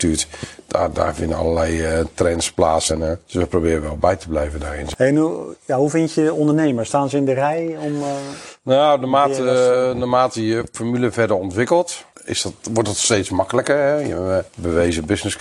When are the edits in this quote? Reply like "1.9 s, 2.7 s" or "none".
2.9 s